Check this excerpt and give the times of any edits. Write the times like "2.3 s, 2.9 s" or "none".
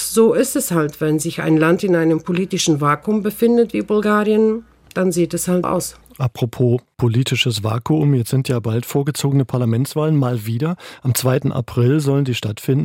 5.6 s

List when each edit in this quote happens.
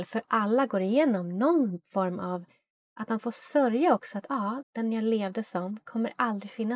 4.6 s

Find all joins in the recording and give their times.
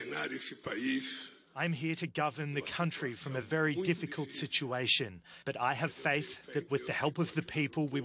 none

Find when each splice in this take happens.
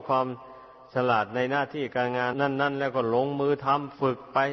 2.3 s

